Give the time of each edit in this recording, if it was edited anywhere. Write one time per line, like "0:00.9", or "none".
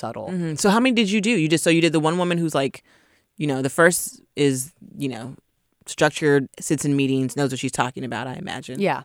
0:06.5